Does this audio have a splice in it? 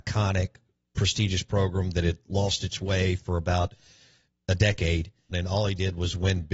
yes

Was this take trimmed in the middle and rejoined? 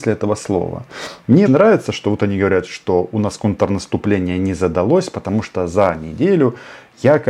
yes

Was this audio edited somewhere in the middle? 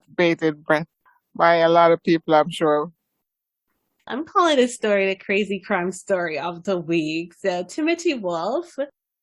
no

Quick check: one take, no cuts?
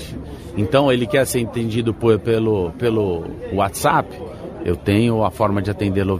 yes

